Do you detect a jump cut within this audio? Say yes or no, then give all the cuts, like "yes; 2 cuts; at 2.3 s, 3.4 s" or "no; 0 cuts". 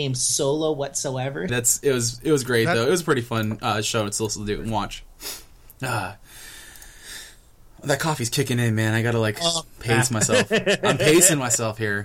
yes; 1 cut; at 1.5 s